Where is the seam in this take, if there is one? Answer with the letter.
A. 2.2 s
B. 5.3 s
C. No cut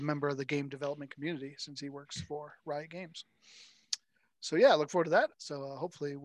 B